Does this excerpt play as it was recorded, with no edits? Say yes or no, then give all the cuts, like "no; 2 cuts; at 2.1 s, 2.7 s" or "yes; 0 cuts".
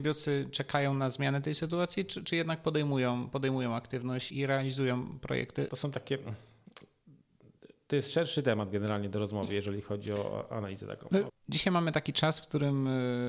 no; 3 cuts; at 4.3 s, 5.7 s, 11.3 s